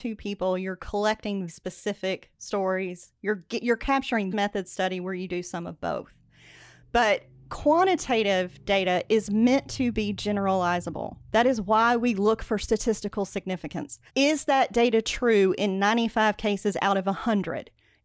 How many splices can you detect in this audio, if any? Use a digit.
3